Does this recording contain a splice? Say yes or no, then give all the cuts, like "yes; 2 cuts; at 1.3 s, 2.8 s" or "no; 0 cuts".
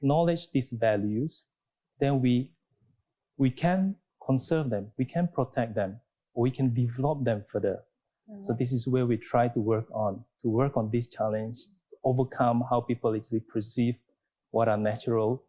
no; 0 cuts